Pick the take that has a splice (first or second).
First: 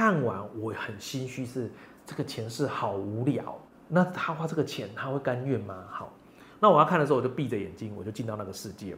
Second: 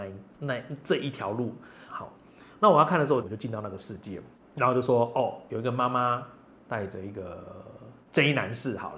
second